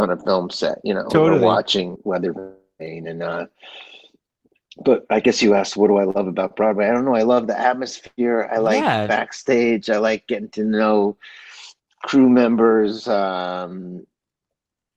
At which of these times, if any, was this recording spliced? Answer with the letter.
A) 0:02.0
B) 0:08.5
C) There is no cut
A